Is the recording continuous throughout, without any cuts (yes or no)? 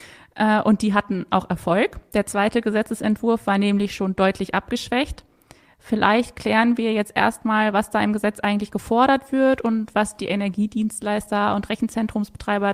yes